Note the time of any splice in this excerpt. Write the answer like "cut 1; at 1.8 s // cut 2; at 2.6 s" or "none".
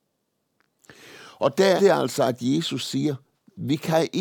cut 1; at 1.8 s